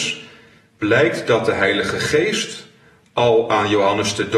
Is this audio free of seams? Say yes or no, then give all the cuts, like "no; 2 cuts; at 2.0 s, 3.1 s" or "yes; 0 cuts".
yes; 0 cuts